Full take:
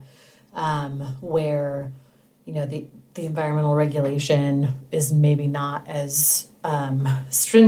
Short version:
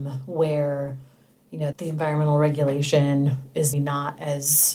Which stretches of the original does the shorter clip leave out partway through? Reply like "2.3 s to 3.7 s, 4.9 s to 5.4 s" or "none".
2.7 s to 3.1 s, 5.1 s to 5.4 s